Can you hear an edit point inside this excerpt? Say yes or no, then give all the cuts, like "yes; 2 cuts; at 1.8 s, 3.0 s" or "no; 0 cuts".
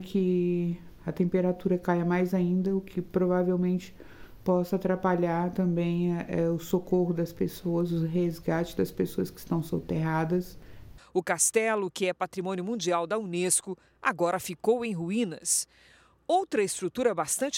yes; 1 cut; at 11.0 s